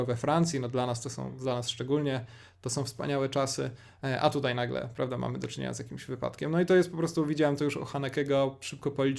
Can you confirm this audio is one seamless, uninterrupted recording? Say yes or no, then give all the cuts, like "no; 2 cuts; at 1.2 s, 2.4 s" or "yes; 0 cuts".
yes; 0 cuts